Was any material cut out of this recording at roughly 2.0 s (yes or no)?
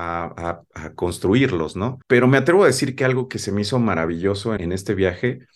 yes